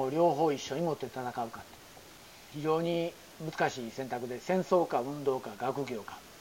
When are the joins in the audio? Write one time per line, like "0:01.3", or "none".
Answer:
0:02.5

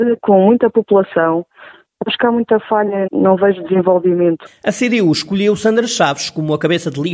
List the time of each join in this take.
0:03.1
0:04.5

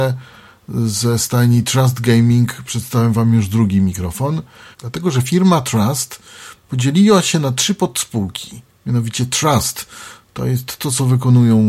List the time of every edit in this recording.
0:04.7

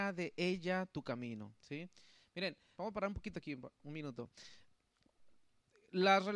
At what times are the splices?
0:02.7

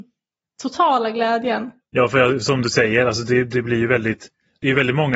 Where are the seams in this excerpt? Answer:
0:01.8

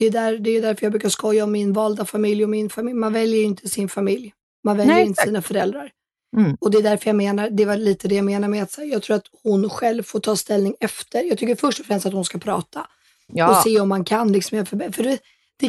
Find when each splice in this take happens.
none

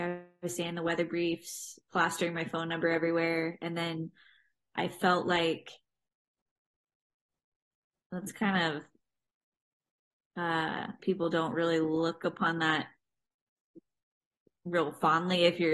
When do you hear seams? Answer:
0:11.0

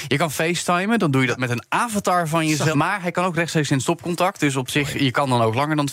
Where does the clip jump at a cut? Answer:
0:02.7

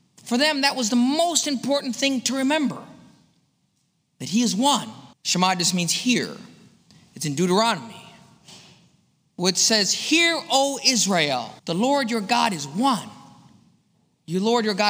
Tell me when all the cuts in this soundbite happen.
0:05.1
0:11.6

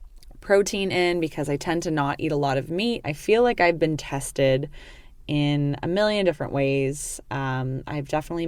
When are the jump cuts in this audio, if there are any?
0:03.0

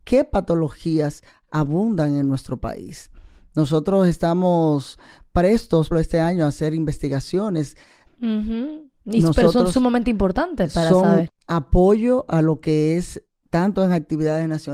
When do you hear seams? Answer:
0:05.9
0:08.1
0:11.3

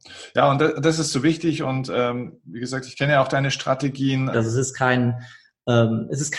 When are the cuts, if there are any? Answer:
0:04.3

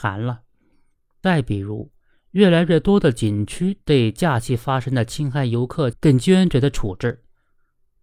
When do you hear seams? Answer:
0:05.9

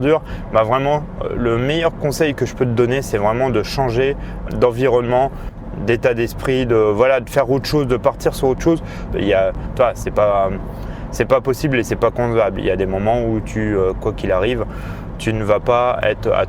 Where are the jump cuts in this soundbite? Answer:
0:04.5
0:09.1

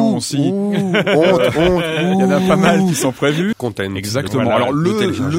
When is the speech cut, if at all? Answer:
0:03.5

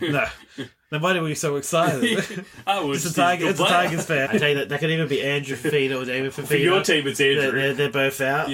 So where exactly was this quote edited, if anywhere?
0:04.3

